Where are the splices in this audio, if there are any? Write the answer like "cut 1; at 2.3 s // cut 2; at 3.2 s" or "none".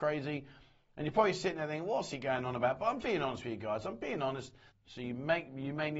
cut 1; at 3.0 s // cut 2; at 4.7 s